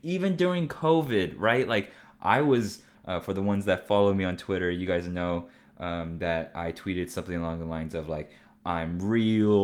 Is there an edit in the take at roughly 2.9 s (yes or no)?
yes